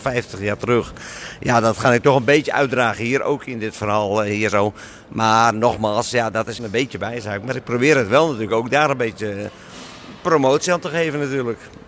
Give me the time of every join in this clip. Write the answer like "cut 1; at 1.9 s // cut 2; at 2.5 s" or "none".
cut 1; at 6.6 s

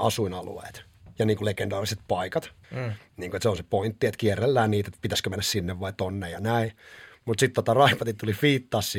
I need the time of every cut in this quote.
cut 1; at 2.6 s

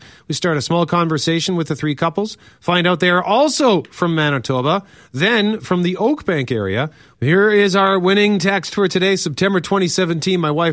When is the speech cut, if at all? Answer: cut 1; at 7.1 s

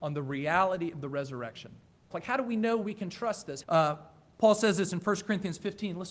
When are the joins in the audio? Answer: cut 1; at 2.1 s // cut 2; at 3.6 s

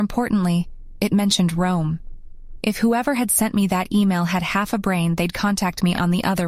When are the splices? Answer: none

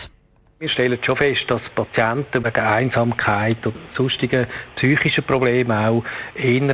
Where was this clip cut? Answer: cut 1; at 2.4 s

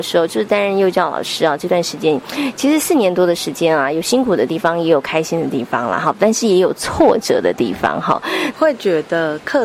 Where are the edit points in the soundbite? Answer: cut 1; at 8.5 s

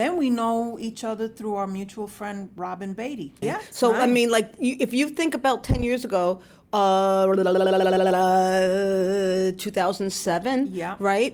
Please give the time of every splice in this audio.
cut 1; at 3.4 s

